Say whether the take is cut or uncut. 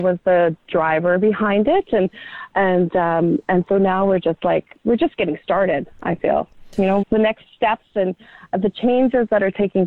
cut